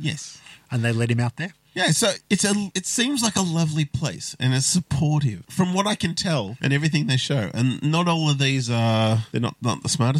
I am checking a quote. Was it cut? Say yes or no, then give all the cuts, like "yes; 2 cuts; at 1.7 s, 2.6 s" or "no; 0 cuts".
yes; 1 cut; at 2.2 s